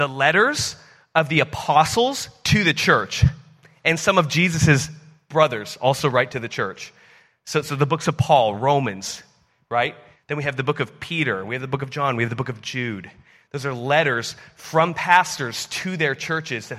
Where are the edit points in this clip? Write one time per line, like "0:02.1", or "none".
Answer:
0:10.1